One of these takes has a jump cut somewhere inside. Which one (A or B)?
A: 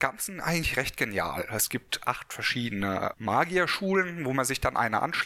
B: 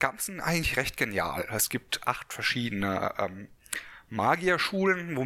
A